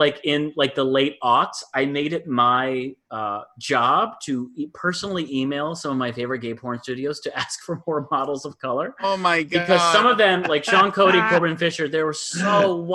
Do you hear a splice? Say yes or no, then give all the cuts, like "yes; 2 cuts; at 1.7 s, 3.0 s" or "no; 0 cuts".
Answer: no; 0 cuts